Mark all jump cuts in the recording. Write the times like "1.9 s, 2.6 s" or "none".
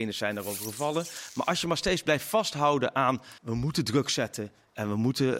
3.4 s

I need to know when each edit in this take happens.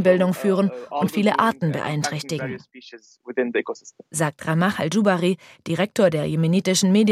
4.1 s

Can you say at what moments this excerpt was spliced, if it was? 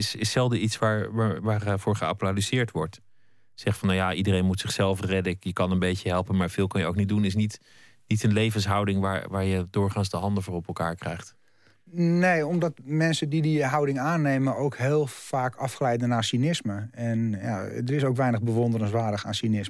none

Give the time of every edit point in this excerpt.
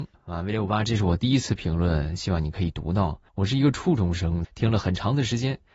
3.3 s, 4.4 s

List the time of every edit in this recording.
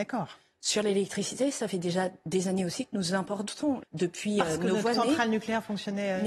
3.8 s, 4.9 s

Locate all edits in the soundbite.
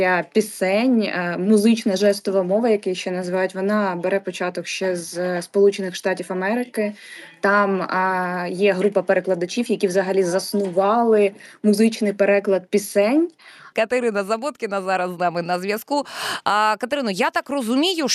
13.7 s

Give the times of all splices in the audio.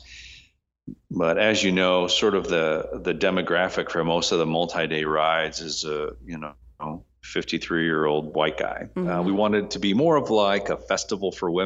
none

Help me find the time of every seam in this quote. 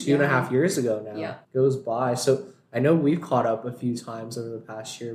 1.4 s

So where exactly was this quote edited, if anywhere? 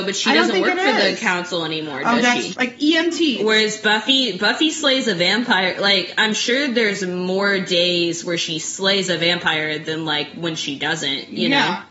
2.5 s

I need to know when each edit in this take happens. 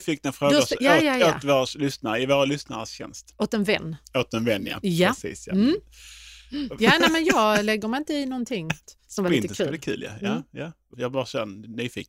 6.8 s, 8.8 s, 10.9 s

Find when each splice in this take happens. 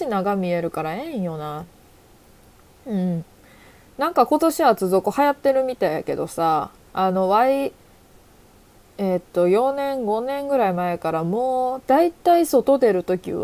none

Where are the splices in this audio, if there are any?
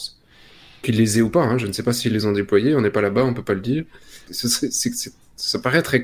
4.3 s

